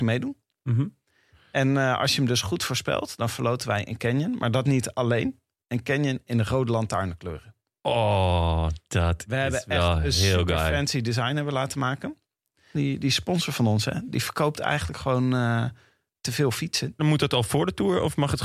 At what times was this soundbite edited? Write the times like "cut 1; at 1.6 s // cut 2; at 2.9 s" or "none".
cut 1; at 12.7 s // cut 2; at 17.0 s